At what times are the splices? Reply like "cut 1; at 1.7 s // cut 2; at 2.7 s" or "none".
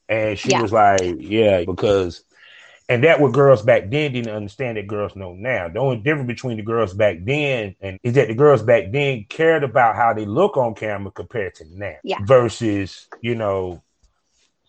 cut 1; at 1.6 s // cut 2; at 7.9 s // cut 3; at 12.0 s